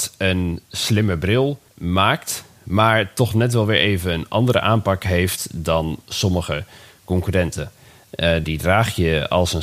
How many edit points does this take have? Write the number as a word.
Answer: two